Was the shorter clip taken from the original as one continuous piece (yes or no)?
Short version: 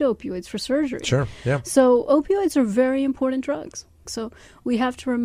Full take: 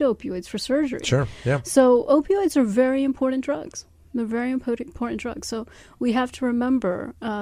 no